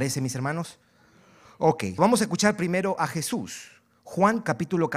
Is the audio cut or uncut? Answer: cut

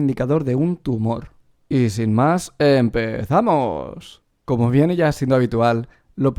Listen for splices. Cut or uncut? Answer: cut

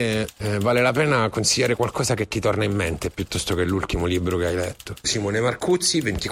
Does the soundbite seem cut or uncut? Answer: cut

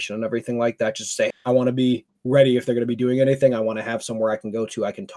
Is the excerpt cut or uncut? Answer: cut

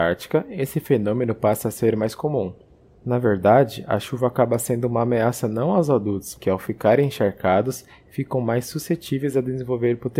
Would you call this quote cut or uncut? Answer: cut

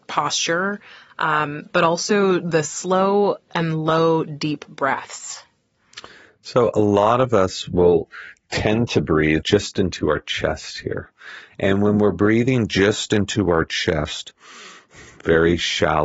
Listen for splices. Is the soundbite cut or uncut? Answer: cut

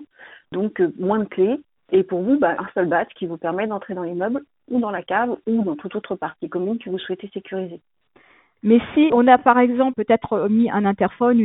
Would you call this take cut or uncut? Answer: cut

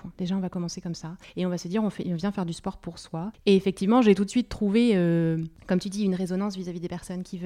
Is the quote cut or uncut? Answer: cut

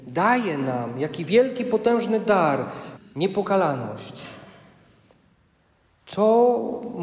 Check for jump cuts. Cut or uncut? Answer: cut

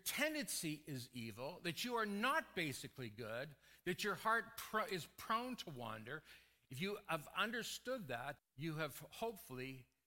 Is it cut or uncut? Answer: cut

